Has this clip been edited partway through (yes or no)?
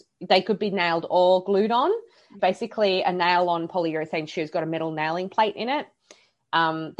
yes